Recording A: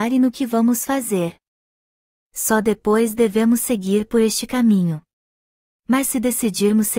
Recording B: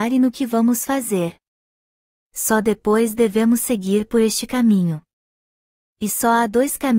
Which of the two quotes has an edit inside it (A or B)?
A